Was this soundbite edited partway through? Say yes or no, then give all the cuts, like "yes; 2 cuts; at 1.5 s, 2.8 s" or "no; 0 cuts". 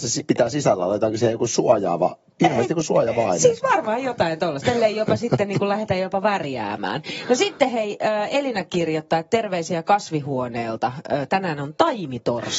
no; 0 cuts